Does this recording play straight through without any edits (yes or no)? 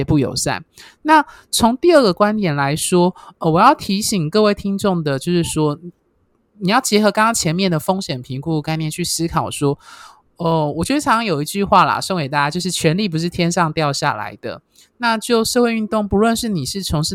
yes